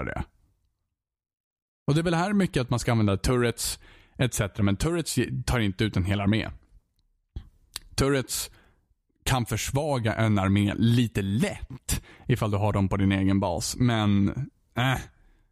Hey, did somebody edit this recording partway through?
no; 0 cuts

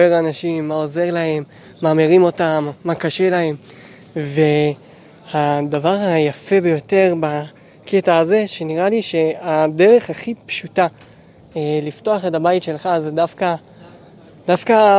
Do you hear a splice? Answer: no; 0 cuts

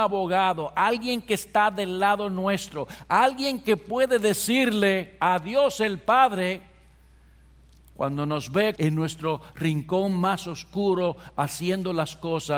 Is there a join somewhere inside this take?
yes; 1 cut; at 8.7 s

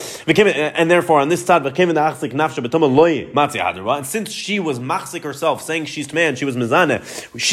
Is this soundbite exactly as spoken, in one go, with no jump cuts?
yes; 0 cuts

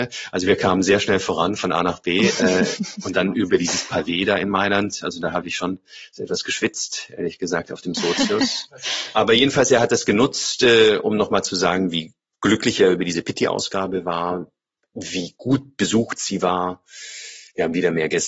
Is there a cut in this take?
no; 0 cuts

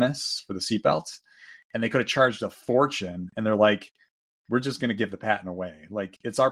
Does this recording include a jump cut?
no; 0 cuts

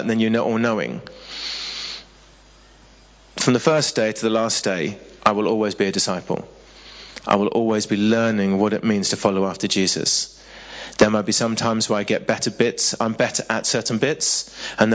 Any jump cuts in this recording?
no; 0 cuts

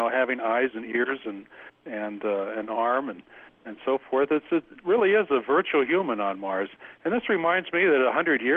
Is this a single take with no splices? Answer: yes; 0 cuts

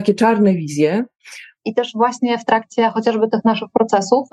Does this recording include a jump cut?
yes; 1 cut; at 1.5 s

